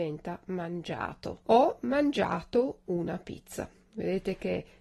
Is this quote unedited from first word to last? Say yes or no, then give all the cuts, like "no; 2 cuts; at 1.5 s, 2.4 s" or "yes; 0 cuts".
no; 1 cut; at 1.4 s